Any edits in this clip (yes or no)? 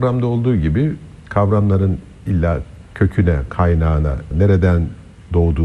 yes